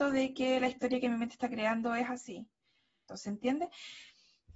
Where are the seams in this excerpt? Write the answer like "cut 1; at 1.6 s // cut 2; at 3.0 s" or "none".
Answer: cut 1; at 3.1 s

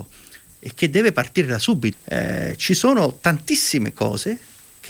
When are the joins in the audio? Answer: cut 1; at 1.9 s

